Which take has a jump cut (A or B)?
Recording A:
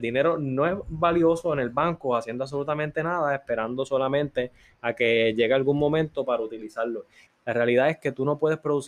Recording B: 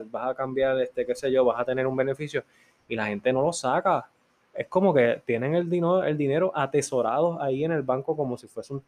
A